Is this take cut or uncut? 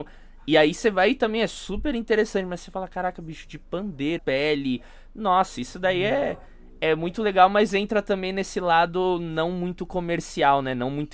cut